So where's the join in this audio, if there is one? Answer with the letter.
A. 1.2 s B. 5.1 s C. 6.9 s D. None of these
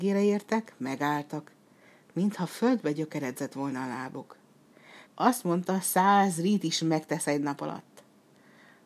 B